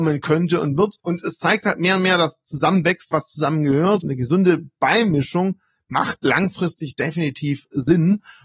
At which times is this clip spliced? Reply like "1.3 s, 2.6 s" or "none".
1.0 s, 4.0 s